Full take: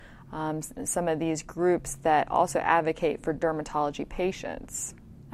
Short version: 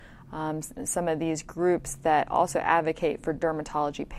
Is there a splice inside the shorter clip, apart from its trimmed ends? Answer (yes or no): no